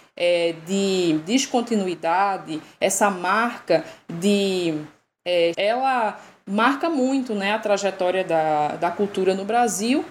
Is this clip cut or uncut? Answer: cut